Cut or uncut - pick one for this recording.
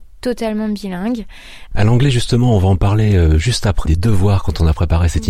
cut